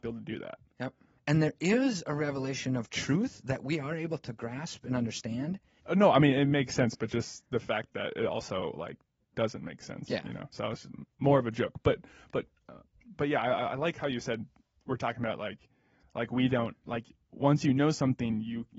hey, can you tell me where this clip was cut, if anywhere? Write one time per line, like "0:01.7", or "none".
0:01.2
0:05.8

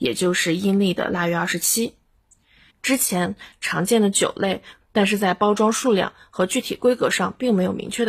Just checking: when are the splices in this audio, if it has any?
0:02.7
0:04.8

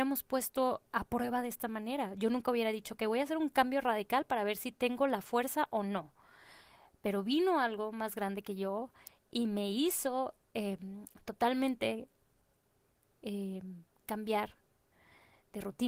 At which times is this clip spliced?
none

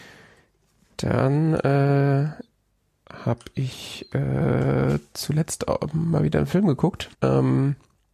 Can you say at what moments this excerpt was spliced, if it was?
0:07.1

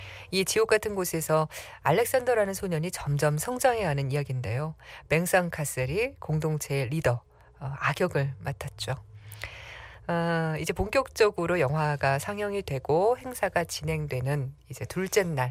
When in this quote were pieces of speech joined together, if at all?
0:10.0

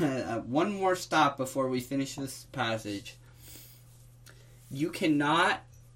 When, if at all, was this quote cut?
none

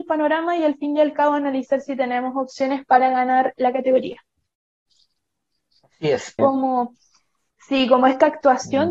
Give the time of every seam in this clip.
0:06.4

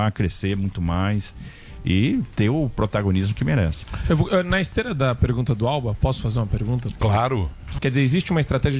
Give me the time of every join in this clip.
0:07.8

